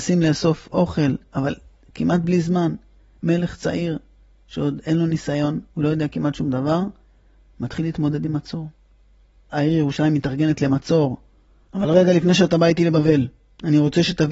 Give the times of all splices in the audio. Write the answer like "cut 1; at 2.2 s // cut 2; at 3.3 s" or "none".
cut 1; at 5.7 s // cut 2; at 9.5 s // cut 3; at 11.7 s

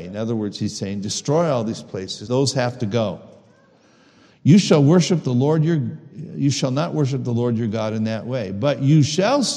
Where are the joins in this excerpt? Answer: cut 1; at 2.3 s

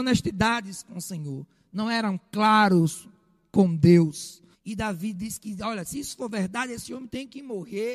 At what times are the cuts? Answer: cut 1; at 4.5 s

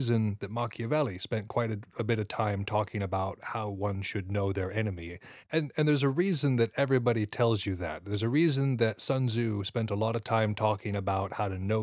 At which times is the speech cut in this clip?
cut 1; at 5.4 s

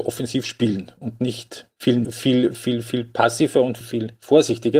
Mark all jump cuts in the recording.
cut 1; at 2.0 s // cut 2; at 3.8 s

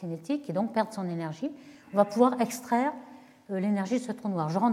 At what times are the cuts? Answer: none

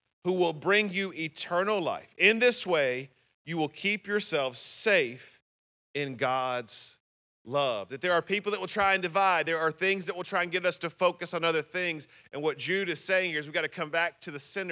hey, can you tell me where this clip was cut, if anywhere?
none

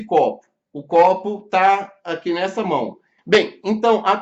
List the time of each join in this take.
cut 1; at 3.2 s

